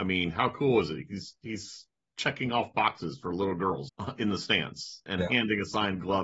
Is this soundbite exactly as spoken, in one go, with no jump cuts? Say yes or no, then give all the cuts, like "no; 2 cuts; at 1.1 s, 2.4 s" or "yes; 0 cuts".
no; 2 cuts; at 3.9 s, 5.1 s